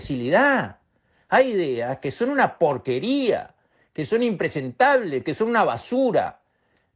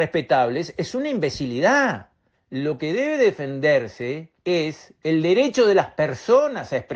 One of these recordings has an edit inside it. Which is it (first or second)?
second